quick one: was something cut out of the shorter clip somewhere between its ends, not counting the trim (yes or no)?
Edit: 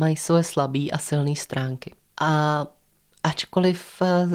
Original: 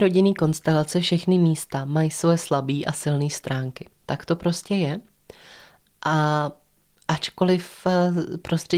yes